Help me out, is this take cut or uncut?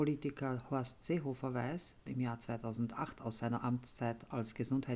cut